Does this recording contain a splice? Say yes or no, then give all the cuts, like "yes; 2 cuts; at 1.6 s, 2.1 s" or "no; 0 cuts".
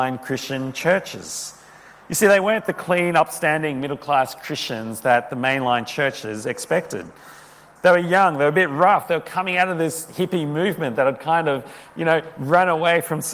yes; 1 cut; at 7.8 s